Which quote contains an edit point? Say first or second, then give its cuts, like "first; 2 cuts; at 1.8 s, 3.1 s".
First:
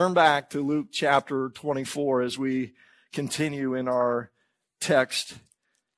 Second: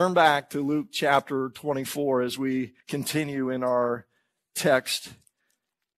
second; 1 cut; at 2.8 s